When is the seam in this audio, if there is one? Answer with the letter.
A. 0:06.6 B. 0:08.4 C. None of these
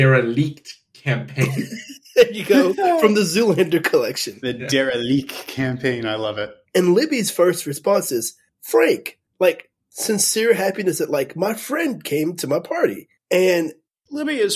A